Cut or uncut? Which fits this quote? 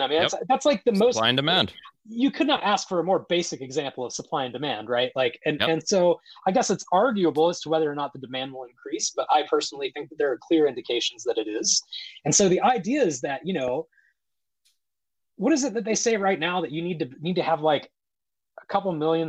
uncut